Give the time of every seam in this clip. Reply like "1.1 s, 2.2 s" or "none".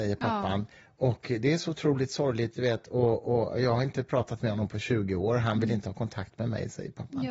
none